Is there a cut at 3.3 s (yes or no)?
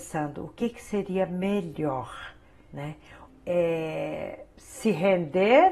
yes